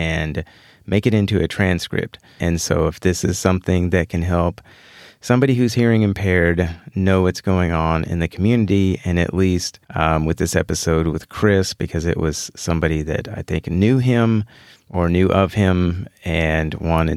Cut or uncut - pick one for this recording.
cut